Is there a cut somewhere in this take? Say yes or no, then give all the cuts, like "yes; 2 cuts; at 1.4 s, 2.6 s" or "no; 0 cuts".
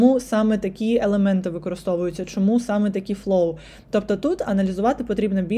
no; 0 cuts